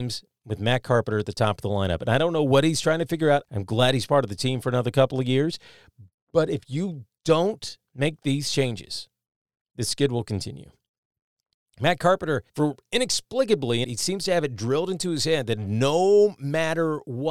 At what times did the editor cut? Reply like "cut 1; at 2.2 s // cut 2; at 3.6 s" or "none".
cut 1; at 3.4 s // cut 2; at 12.5 s // cut 3; at 13.8 s